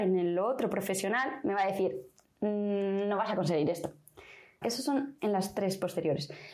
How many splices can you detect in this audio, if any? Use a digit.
1